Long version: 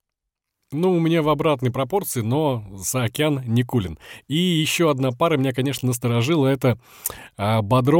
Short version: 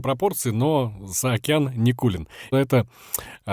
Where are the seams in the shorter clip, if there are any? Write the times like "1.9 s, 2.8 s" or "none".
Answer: 2.5 s